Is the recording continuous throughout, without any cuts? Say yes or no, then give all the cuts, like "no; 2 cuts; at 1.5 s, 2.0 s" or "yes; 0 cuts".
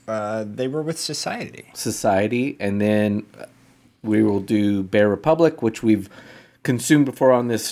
yes; 0 cuts